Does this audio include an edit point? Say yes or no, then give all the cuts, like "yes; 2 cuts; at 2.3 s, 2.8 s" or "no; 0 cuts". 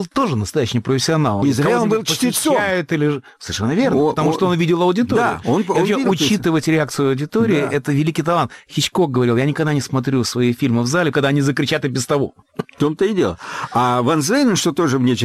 yes; 2 cuts; at 1.4 s, 11.1 s